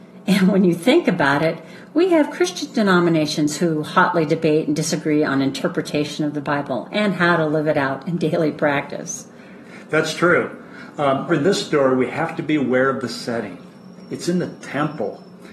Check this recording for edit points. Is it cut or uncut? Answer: cut